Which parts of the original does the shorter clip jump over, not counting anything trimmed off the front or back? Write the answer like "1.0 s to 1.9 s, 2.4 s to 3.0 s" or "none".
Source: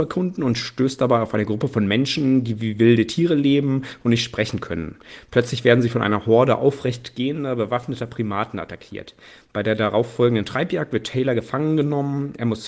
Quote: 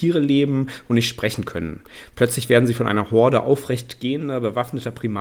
none